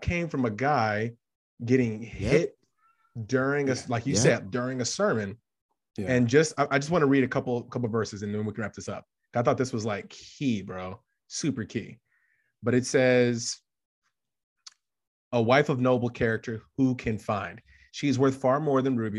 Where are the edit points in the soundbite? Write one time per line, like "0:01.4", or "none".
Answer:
none